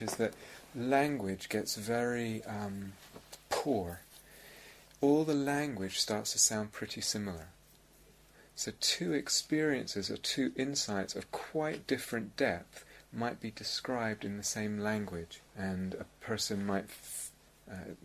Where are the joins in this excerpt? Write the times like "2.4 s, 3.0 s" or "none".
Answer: 15.5 s